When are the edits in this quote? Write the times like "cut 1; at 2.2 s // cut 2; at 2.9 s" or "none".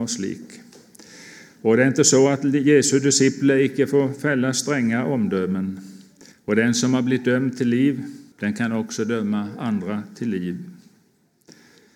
cut 1; at 6.3 s // cut 2; at 8.3 s